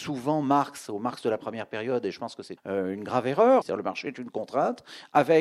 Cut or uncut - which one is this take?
cut